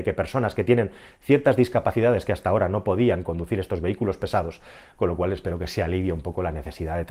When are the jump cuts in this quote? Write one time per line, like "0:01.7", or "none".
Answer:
0:04.9